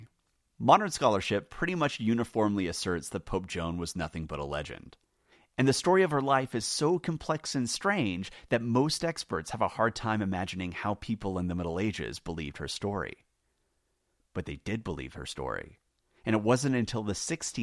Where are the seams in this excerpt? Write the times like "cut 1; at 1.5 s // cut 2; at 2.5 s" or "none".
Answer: none